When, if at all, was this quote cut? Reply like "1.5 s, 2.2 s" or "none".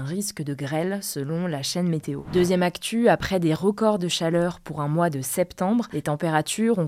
2.2 s